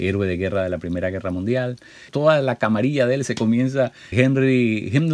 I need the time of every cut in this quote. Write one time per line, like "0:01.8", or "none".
0:02.1
0:04.1